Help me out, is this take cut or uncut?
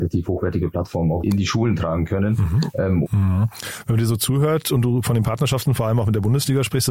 cut